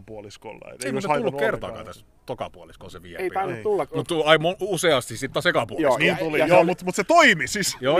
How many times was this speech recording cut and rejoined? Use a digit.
0